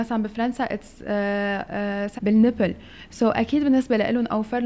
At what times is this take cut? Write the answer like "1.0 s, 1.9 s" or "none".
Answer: 2.2 s